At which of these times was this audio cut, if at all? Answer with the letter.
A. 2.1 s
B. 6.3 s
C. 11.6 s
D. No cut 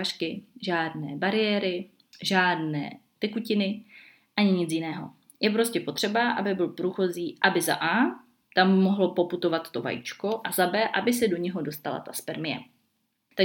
D